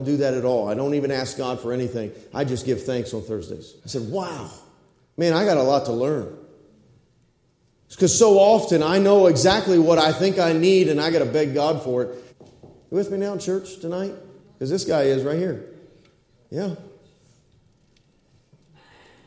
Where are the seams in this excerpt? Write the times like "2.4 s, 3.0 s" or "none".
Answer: 3.8 s, 12.3 s, 14.4 s